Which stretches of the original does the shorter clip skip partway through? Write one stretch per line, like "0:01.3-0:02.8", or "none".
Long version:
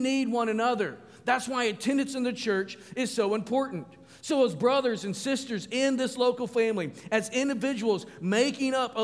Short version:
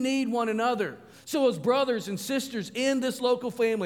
0:01.1-0:04.1